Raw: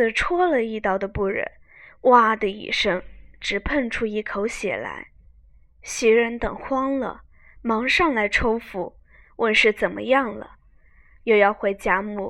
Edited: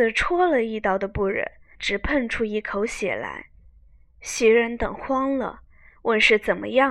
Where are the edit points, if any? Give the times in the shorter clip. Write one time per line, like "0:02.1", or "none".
0:01.7
0:05.9